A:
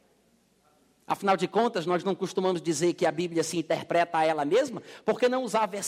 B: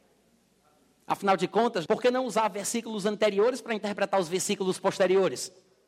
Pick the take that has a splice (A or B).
B